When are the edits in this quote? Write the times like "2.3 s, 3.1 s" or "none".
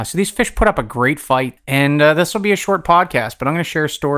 1.6 s